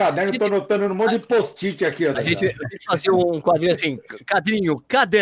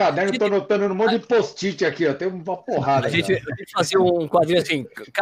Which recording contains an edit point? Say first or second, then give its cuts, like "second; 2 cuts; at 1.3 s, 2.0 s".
first; 1 cut; at 2.1 s